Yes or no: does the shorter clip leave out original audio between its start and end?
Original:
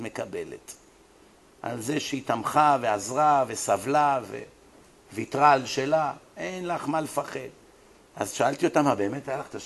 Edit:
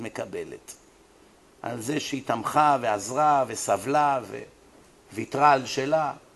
no